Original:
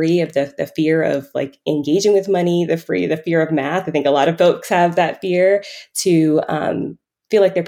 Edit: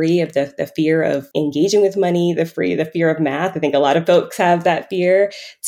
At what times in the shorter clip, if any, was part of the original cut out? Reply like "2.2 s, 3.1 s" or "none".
1.3 s